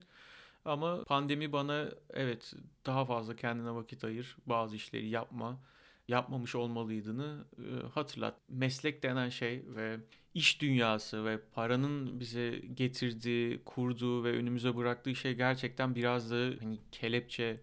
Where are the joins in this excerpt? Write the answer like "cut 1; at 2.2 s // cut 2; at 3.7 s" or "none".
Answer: cut 1; at 8.4 s